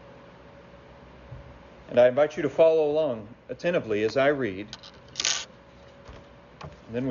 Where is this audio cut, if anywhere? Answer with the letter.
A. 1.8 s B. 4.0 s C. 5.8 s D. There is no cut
A